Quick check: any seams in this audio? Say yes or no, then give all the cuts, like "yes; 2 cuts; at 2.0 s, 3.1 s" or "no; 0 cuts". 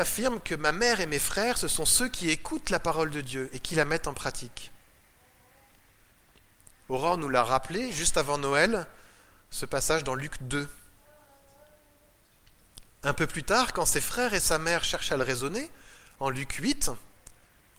yes; 1 cut; at 6.8 s